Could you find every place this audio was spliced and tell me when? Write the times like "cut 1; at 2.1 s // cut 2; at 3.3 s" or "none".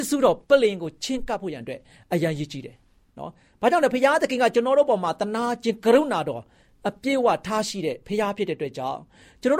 none